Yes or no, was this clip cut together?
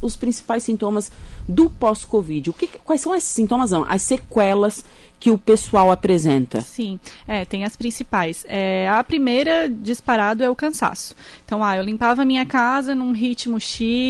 no